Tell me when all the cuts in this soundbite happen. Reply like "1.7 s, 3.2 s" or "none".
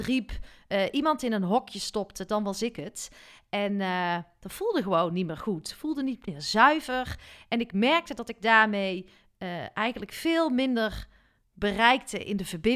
none